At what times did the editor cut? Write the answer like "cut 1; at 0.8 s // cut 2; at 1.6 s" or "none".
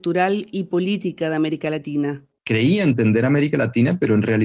cut 1; at 2.4 s